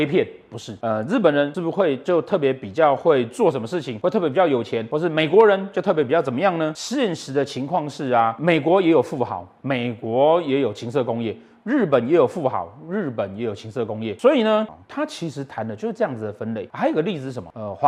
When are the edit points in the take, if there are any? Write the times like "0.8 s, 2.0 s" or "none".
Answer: 14.7 s